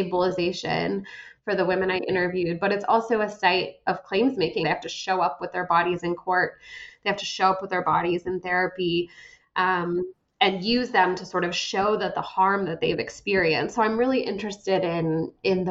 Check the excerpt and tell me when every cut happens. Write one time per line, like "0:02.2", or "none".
0:04.6